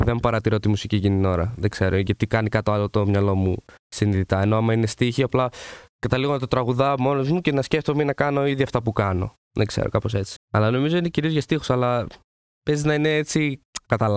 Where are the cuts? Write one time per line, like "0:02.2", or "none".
0:10.4